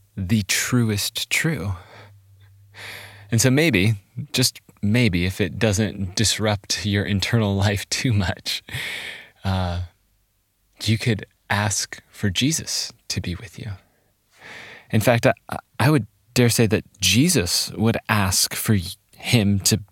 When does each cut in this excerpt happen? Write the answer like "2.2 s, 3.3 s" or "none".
none

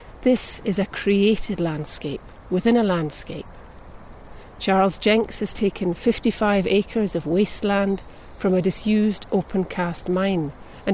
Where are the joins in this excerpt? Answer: none

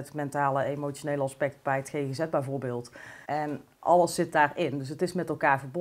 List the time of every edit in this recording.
3.2 s

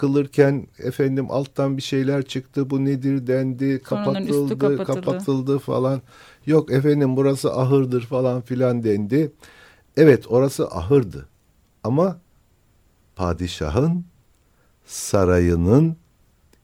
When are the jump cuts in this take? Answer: none

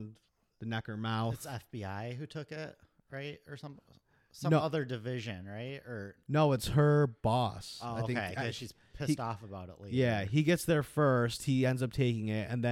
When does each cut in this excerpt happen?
none

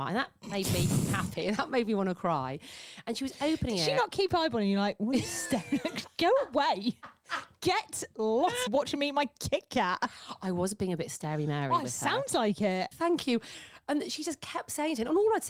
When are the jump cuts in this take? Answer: 8.7 s, 12.9 s

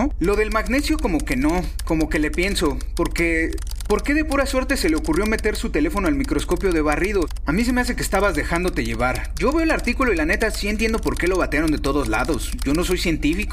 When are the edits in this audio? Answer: 7.5 s

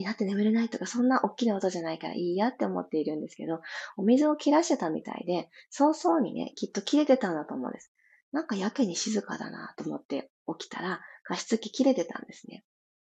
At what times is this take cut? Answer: none

